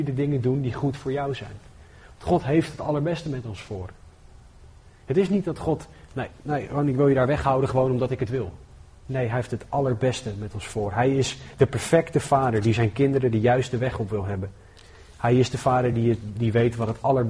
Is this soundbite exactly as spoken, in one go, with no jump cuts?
yes; 0 cuts

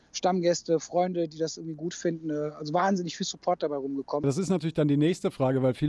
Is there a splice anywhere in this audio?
yes; 1 cut; at 4.2 s

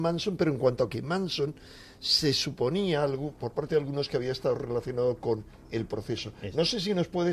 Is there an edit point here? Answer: no; 0 cuts

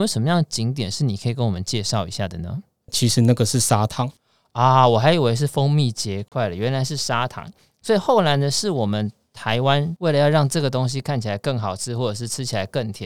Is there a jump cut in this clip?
yes; 1 cut; at 2.9 s

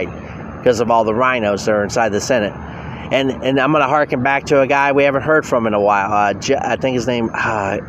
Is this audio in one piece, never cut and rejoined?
yes; 0 cuts

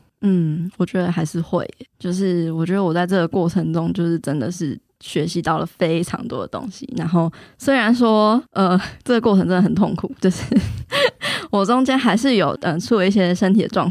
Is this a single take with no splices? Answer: no; 1 cut; at 12.5 s

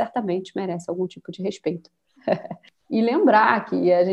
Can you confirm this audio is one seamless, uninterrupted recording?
no; 1 cut; at 2.2 s

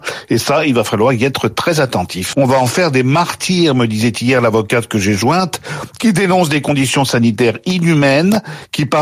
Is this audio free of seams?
no; 1 cut; at 2.3 s

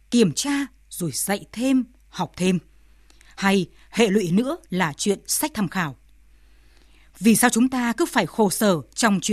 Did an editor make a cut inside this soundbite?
no; 0 cuts

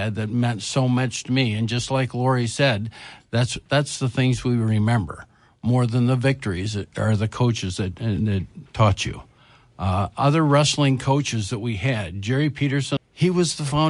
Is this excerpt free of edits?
no; 1 cut; at 13.0 s

